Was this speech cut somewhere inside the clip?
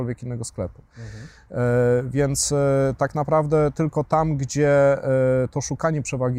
no; 0 cuts

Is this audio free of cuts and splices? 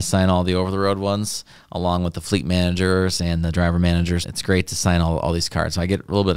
no; 1 cut; at 4.2 s

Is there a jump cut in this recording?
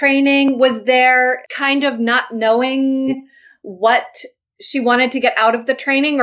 yes; 1 cut; at 1.4 s

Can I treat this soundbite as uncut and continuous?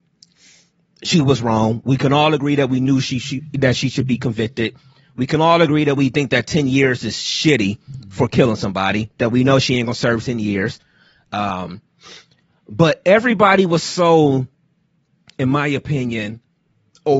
yes; 0 cuts

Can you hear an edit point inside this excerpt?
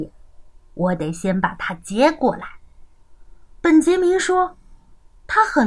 yes; 1 cut; at 3.5 s

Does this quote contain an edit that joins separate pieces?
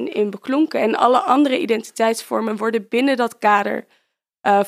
no; 0 cuts

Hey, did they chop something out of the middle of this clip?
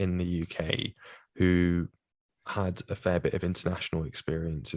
no; 0 cuts

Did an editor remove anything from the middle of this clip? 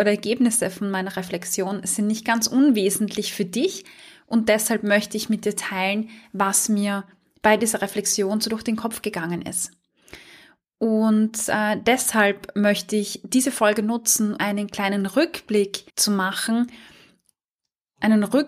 yes; 2 cuts; at 14.4 s, 15.9 s

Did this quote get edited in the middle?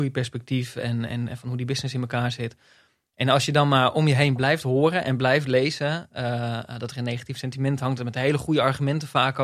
no; 0 cuts

